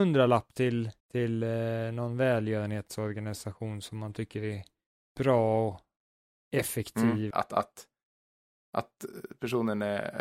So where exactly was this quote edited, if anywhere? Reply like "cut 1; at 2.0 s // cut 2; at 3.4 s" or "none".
cut 1; at 1.0 s // cut 2; at 7.3 s